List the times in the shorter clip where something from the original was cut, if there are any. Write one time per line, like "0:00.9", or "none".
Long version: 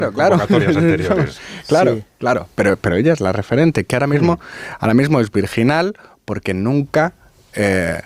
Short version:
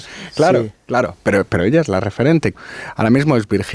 0:02.5